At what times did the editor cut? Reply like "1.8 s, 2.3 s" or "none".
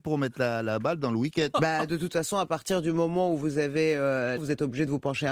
1.5 s, 4.4 s